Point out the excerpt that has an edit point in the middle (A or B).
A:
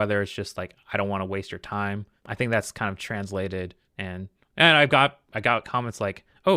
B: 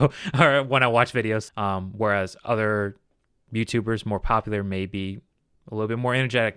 B